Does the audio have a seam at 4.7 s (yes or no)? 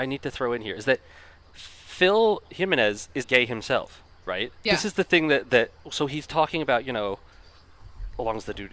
yes